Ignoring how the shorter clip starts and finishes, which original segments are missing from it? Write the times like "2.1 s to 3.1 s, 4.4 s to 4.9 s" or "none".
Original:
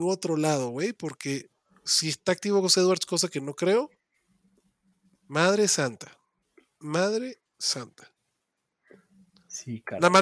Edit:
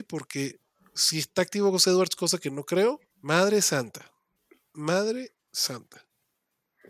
4.0 s to 5.2 s